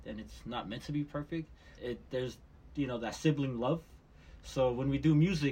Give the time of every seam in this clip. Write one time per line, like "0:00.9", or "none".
0:01.8